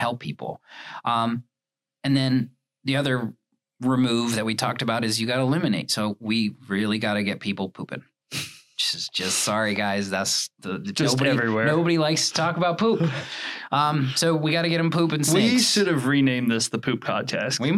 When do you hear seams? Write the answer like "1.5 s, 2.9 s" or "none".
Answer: none